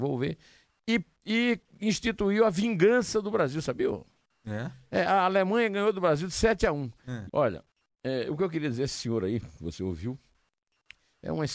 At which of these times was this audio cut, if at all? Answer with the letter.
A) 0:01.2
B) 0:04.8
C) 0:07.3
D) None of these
C